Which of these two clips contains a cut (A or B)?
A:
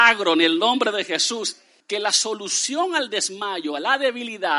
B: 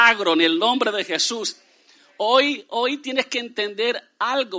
A